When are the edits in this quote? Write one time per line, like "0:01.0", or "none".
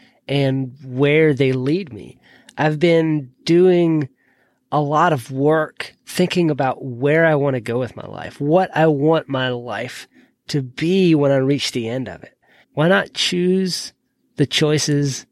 0:12.6